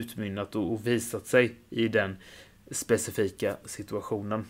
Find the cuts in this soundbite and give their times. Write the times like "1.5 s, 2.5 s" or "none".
none